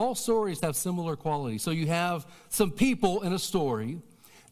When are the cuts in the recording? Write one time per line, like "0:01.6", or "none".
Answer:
none